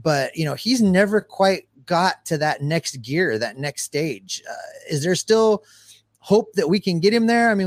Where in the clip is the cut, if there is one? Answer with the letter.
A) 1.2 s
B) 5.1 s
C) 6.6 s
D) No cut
D